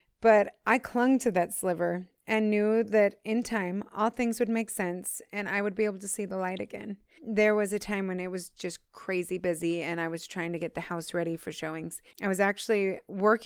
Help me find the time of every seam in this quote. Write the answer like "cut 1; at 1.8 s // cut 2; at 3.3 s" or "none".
cut 1; at 7.2 s // cut 2; at 12.1 s